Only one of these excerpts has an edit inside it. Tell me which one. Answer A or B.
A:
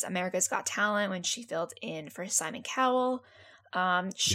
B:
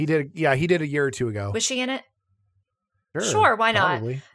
B